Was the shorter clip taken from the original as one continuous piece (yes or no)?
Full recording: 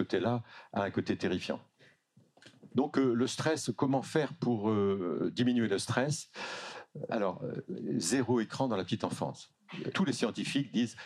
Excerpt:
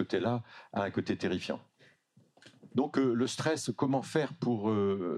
yes